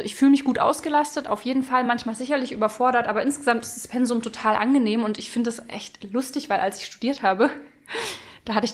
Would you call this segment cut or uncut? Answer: uncut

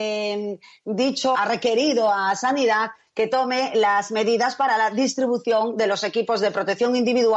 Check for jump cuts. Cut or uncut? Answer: cut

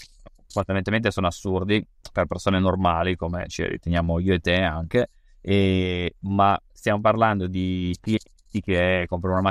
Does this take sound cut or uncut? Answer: uncut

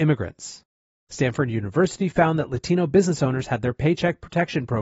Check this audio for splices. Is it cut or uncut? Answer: cut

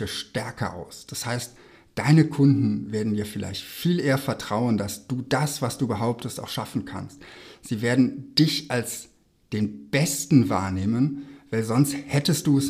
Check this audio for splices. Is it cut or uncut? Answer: uncut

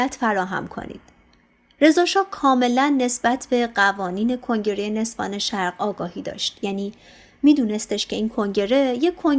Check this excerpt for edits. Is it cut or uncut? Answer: uncut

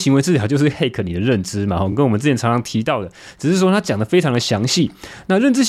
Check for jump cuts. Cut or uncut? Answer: uncut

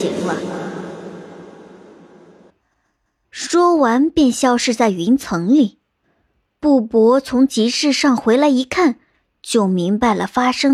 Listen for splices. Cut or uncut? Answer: uncut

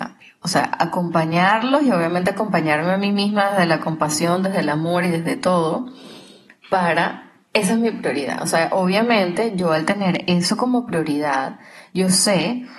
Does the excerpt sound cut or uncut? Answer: uncut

